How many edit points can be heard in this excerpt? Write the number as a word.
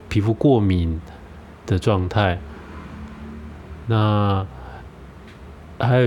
zero